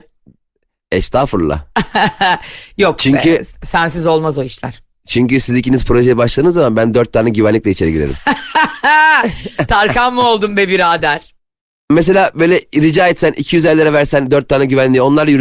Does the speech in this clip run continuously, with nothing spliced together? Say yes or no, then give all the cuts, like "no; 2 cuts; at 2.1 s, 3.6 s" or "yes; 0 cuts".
yes; 0 cuts